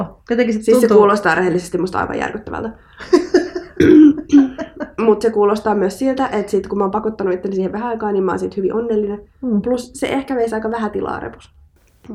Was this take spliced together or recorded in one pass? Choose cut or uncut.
uncut